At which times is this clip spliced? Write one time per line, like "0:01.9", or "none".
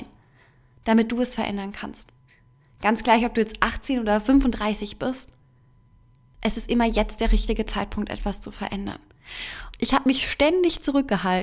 0:09.7